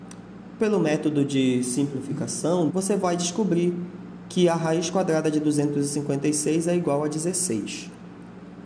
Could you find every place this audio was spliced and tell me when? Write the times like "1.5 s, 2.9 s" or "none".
2.7 s

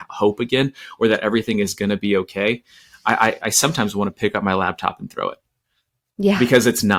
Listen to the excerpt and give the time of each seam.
none

